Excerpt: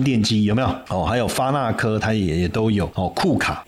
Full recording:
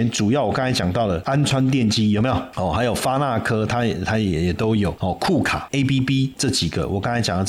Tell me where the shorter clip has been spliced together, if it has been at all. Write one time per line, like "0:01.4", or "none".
0:02.0